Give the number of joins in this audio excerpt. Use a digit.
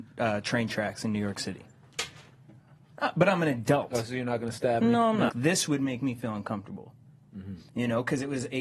1